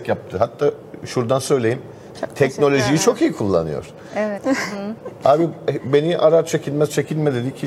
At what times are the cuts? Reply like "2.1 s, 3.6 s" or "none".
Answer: 2.1 s, 4.4 s